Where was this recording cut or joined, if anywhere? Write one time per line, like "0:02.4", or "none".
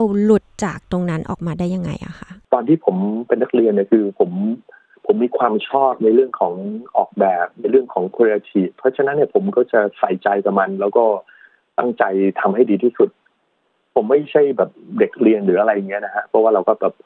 none